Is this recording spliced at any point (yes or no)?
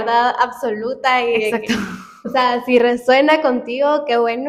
no